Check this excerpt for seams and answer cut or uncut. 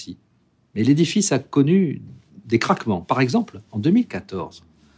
uncut